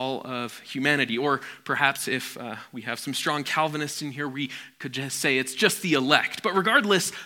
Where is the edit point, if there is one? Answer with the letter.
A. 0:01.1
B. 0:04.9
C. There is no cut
C